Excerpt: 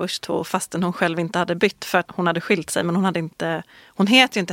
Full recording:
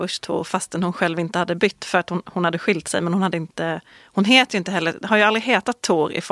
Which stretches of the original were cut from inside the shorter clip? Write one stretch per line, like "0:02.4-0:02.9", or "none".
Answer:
0:02.1-0:02.2